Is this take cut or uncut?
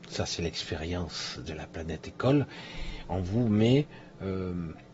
uncut